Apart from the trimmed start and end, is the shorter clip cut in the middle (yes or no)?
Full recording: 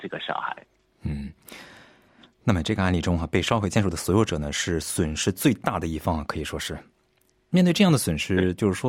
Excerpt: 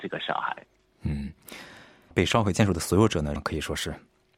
yes